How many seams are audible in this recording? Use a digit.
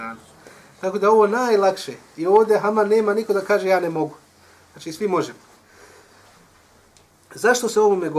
0